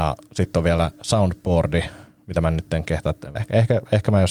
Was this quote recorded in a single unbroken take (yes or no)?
no